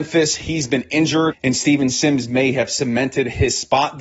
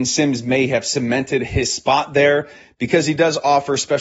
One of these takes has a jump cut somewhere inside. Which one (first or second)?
first